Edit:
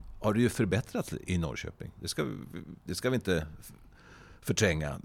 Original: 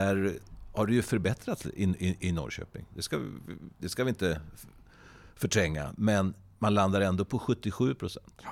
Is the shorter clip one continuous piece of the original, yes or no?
no